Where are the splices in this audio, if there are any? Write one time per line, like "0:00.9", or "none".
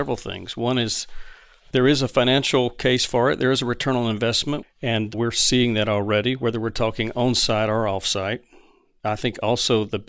0:04.6